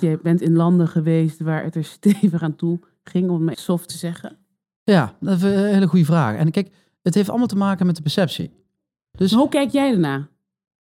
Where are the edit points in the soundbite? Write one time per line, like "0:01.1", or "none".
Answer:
0:03.5

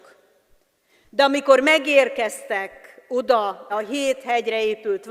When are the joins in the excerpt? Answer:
0:03.7

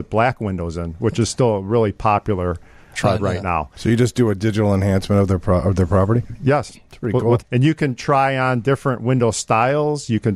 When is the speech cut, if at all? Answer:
0:03.2
0:07.4

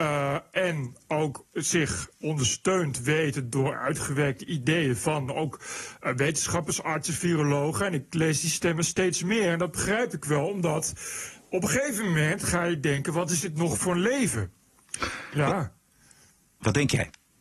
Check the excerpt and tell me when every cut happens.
0:15.3

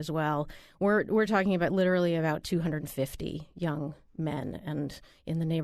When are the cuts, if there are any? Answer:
none

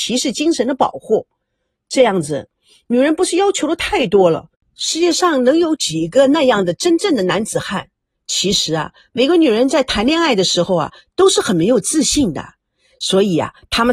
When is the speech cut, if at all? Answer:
0:08.1

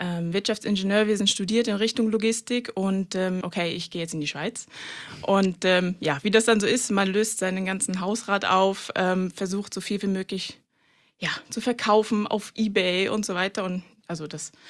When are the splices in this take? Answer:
0:03.4

